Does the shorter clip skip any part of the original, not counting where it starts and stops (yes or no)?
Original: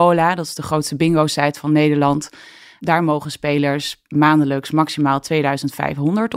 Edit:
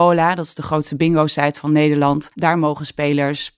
yes